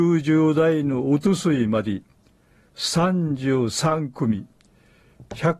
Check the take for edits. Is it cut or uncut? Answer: uncut